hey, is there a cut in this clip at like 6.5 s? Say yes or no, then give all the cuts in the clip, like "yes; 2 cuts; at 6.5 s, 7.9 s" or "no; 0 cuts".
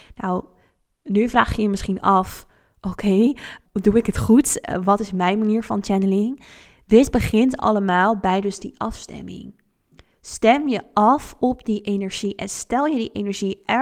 no; 1 cut; at 3.7 s